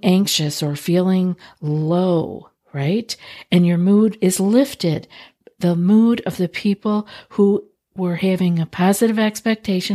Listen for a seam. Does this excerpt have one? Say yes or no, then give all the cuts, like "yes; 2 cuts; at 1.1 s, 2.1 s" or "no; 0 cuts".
no; 0 cuts